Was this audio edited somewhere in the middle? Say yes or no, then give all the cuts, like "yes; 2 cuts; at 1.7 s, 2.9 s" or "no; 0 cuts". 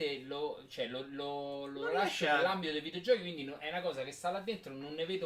no; 0 cuts